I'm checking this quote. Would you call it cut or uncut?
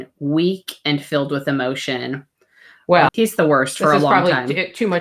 cut